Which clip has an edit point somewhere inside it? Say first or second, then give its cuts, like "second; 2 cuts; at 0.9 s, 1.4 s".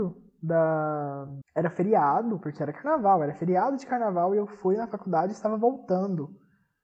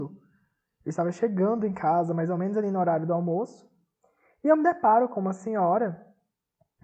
first; 1 cut; at 1.4 s